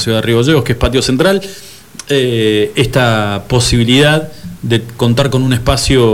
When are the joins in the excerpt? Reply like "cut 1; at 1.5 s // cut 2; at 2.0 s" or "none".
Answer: none